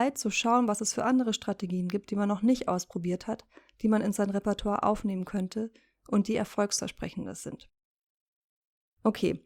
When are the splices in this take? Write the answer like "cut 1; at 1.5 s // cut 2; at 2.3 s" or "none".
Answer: none